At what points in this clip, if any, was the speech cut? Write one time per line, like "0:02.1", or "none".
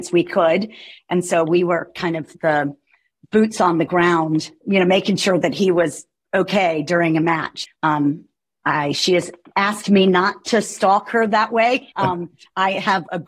0:01.0
0:07.6
0:11.9